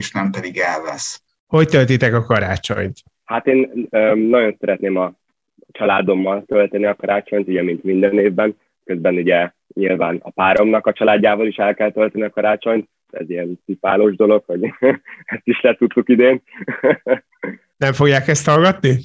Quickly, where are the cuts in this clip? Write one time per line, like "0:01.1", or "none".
0:01.3